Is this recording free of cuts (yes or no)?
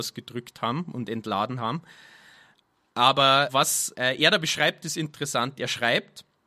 yes